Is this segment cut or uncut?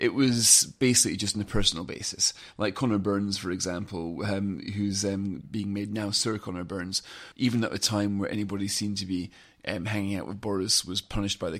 cut